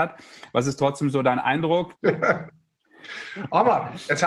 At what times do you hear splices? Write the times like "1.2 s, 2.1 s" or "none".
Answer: 1.9 s